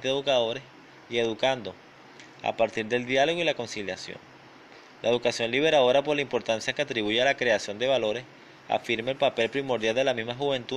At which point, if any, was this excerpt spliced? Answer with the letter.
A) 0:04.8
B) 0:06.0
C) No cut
C